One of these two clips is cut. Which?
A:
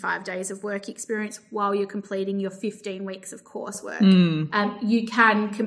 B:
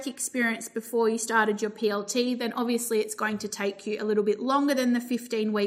A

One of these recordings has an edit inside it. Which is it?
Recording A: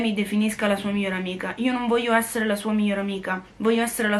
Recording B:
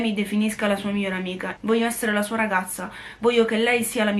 B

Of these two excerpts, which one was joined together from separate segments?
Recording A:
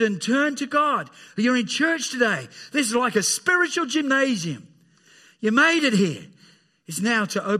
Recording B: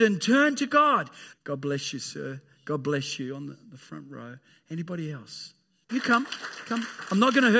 B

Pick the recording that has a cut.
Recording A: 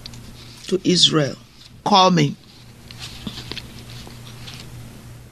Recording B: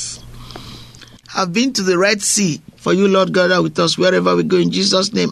B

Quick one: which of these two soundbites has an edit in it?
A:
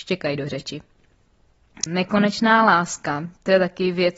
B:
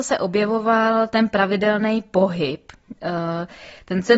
A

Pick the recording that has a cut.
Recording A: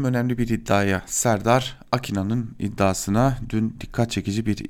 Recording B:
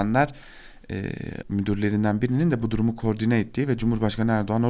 B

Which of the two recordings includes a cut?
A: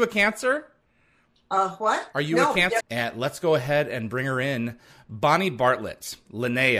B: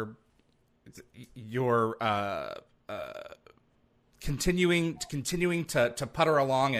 A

